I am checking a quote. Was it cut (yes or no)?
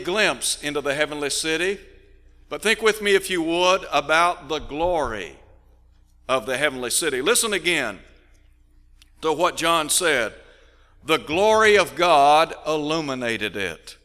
no